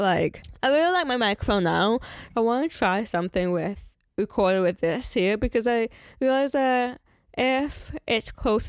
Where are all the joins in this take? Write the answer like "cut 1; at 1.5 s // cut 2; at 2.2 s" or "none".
cut 1; at 2.3 s